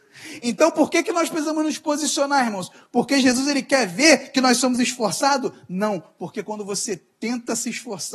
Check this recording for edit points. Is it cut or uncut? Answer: uncut